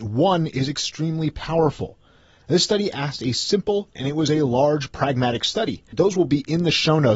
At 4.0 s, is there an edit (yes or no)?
yes